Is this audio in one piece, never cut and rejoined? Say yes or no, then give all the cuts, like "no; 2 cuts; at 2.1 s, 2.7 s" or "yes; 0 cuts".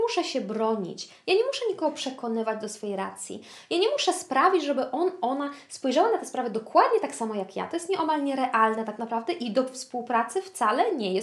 yes; 0 cuts